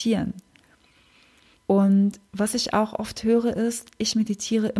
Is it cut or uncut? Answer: cut